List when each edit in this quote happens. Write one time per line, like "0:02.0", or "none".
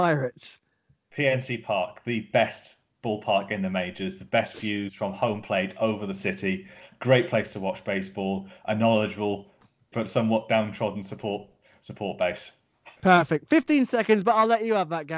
0:09.9
0:13.0

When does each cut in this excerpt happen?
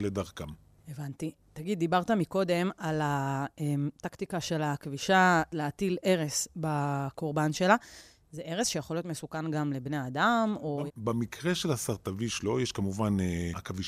0:10.9

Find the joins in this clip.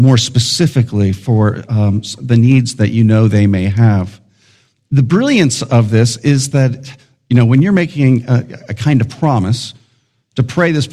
none

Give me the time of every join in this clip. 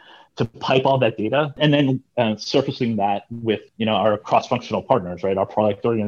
0:01.6
0:03.7

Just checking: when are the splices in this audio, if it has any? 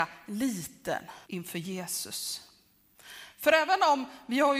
0:01.2

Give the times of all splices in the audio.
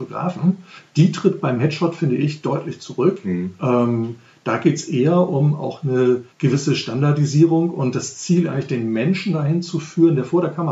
0:06.3

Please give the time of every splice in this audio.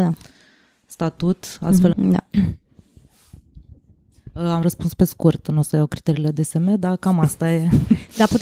0:01.9

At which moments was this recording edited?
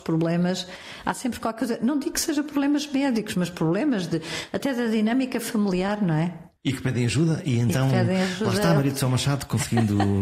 0:06.6

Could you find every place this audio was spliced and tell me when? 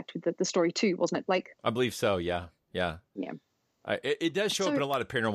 none

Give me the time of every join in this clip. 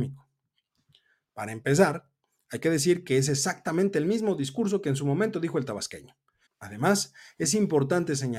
0:06.4

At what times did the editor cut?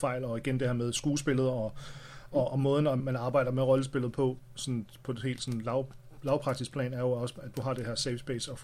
0:03.0
0:07.5

